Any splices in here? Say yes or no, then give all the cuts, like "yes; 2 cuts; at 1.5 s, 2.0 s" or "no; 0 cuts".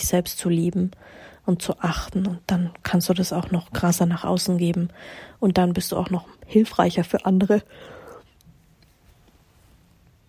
no; 0 cuts